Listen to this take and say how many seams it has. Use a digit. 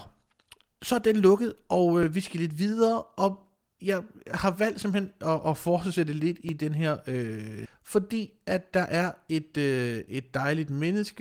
1